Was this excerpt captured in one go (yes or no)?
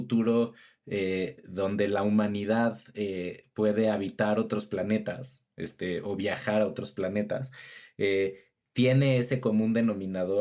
yes